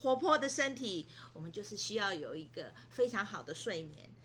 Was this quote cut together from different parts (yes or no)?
no